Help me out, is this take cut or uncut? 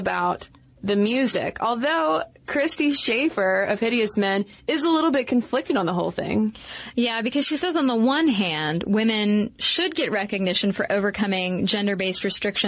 uncut